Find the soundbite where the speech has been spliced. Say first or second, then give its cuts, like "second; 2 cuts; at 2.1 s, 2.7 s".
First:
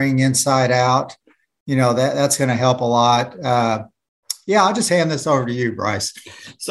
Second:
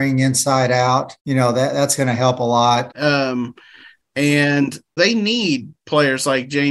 second; 3 cuts; at 1.2 s, 2.9 s, 5.0 s